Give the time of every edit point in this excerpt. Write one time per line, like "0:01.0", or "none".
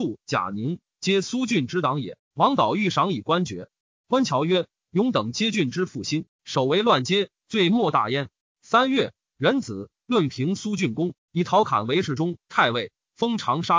0:02.2
0:08.4